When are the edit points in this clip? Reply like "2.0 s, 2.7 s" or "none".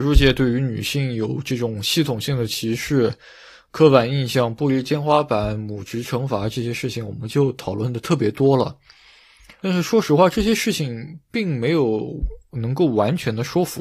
none